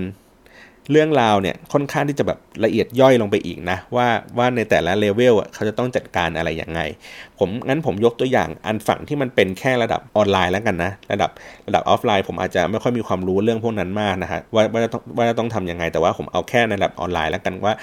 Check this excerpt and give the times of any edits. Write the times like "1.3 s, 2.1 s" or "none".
10.1 s, 14.5 s